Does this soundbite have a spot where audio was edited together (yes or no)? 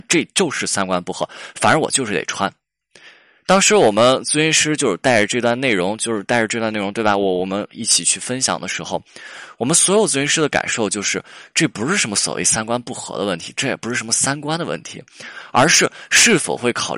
no